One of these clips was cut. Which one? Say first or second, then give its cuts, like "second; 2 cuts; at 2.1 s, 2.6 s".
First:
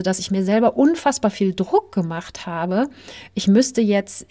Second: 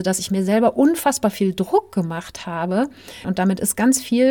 second; 1 cut; at 3.2 s